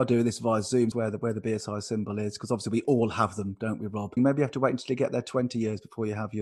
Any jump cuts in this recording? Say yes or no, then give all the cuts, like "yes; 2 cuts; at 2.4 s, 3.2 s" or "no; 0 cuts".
yes; 2 cuts; at 0.9 s, 4.2 s